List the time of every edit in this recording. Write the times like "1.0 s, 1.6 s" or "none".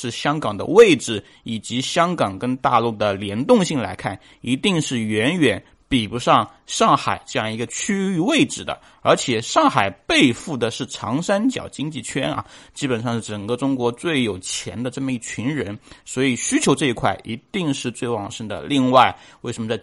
none

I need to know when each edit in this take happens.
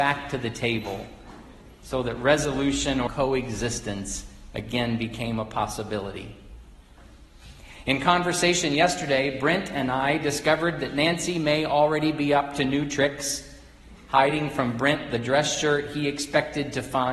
3.1 s

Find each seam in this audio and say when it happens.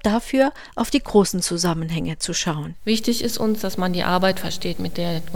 none

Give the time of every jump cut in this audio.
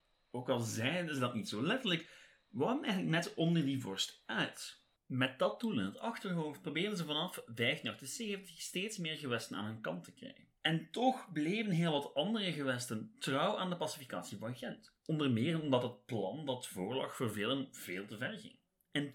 10.6 s

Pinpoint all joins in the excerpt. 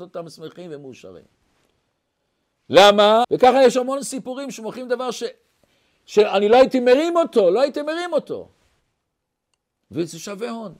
3.2 s

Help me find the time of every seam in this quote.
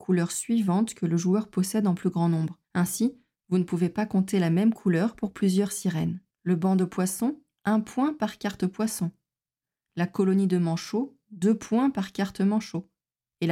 2.6 s, 6.3 s

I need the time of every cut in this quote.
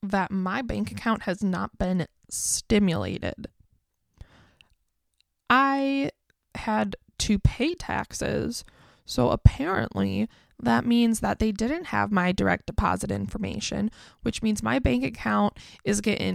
none

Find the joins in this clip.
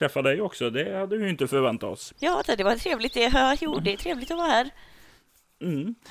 2.1 s

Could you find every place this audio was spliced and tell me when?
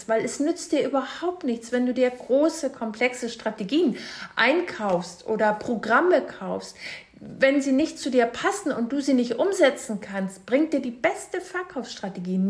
none

